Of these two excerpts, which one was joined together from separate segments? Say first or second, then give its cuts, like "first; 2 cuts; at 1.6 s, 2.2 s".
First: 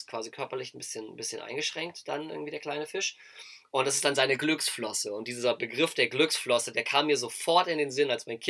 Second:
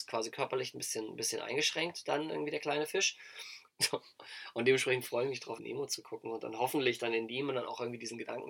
second; 2 cuts; at 3.7 s, 5.6 s